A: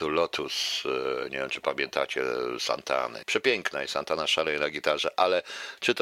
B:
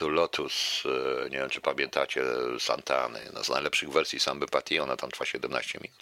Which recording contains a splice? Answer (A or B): A